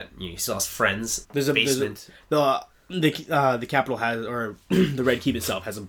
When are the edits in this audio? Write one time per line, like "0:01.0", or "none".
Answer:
0:01.2